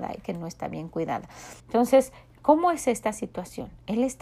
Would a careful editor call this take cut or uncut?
cut